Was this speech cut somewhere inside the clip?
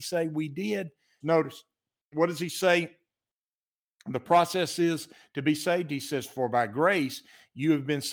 yes; 1 cut; at 1.2 s

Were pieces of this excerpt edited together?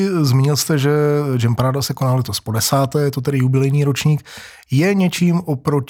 no; 0 cuts

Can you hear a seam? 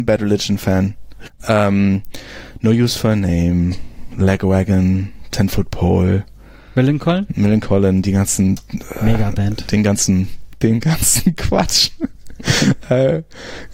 yes; 1 cut; at 1.2 s

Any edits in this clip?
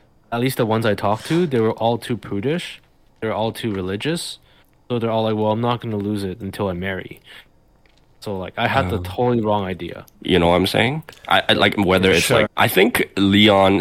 yes; 2 cuts; at 10.1 s, 12.5 s

